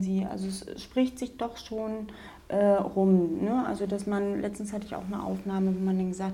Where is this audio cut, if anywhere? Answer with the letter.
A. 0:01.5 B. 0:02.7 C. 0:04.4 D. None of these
D